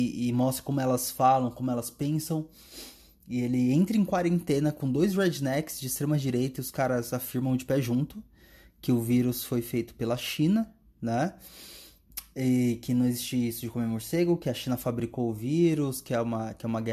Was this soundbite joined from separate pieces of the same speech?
no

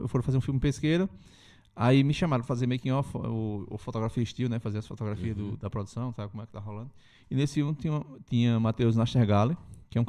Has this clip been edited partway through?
no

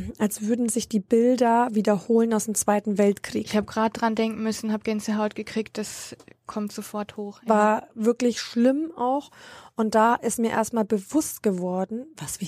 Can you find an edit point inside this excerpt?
no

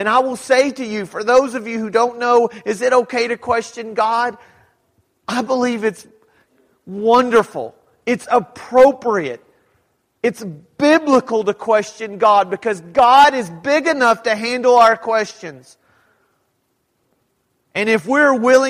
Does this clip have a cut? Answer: no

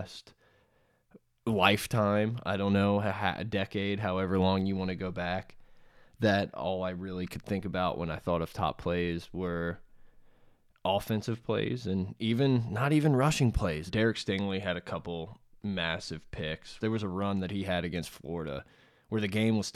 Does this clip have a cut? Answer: yes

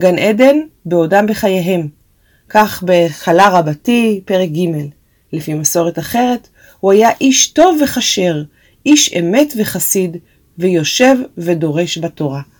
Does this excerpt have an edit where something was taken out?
no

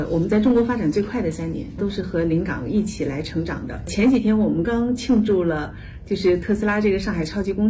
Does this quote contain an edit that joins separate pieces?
yes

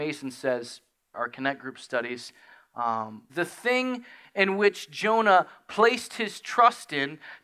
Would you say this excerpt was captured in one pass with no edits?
no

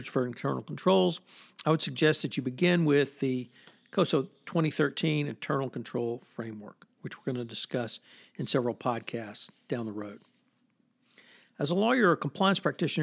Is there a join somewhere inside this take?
no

